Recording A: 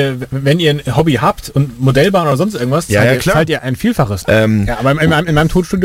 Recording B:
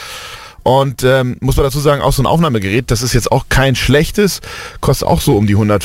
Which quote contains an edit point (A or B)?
A